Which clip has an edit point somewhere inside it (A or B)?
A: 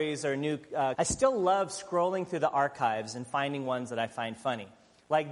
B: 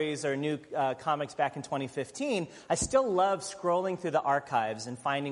A